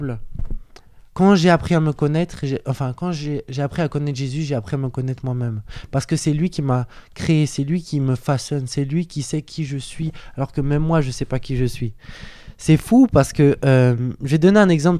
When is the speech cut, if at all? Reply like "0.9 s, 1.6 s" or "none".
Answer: 1.1 s